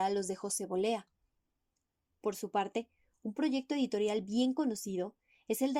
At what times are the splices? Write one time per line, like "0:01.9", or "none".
none